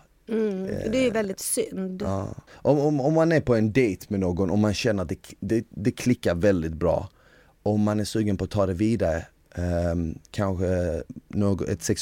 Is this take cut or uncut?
uncut